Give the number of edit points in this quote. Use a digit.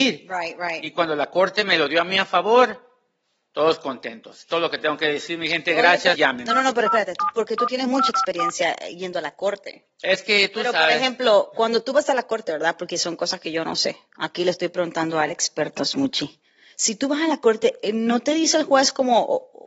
1